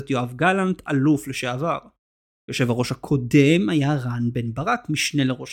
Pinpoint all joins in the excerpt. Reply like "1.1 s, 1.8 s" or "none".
none